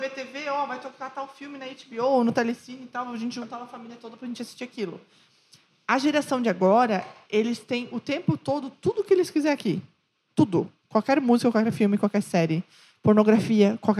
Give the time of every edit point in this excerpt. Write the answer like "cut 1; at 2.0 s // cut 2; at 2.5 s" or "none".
none